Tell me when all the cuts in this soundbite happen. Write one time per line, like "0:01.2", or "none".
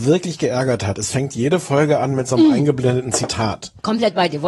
none